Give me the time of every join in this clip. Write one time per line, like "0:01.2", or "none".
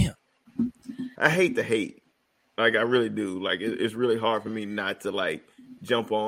0:01.2